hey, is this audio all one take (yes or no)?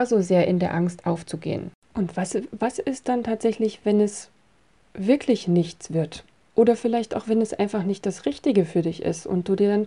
yes